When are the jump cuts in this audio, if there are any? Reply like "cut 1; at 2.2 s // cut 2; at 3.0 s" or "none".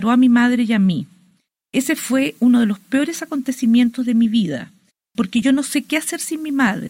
none